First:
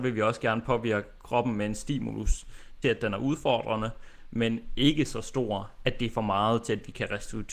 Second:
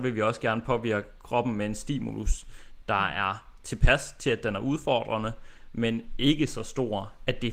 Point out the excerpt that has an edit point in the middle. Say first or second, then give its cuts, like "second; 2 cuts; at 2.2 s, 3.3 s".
first; 1 cut; at 2.8 s